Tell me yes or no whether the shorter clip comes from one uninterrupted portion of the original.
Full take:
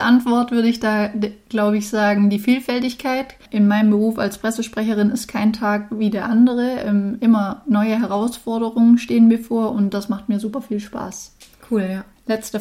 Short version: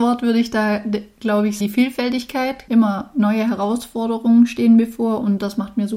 no